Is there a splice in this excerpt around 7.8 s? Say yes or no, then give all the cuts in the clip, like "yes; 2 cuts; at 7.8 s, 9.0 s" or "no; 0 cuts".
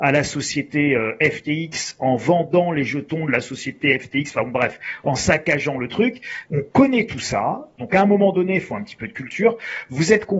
yes; 2 cuts; at 6.5 s, 7.8 s